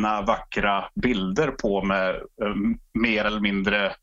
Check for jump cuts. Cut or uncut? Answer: uncut